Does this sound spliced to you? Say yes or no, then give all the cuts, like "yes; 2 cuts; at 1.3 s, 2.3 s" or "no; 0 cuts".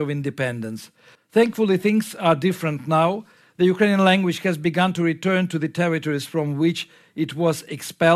yes; 1 cut; at 1.1 s